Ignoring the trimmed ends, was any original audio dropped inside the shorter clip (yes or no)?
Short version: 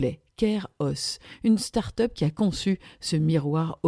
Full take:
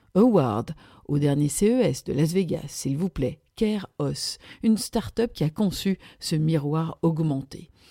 no